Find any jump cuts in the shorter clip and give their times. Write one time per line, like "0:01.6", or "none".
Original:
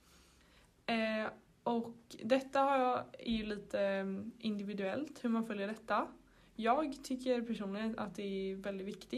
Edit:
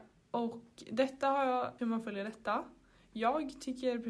0:01.8